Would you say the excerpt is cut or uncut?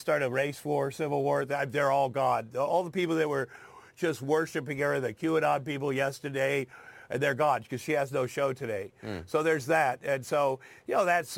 uncut